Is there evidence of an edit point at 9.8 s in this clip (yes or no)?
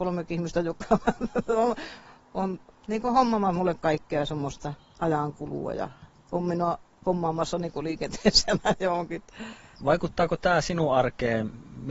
yes